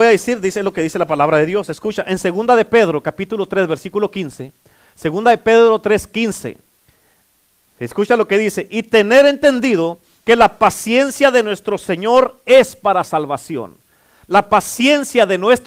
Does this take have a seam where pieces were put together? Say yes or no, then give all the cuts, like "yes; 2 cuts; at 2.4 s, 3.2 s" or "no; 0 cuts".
no; 0 cuts